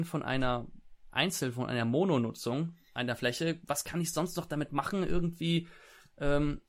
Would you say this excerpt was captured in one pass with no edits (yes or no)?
yes